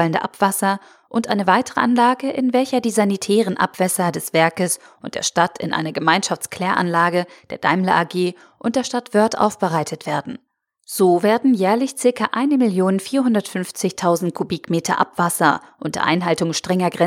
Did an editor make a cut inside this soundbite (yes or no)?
no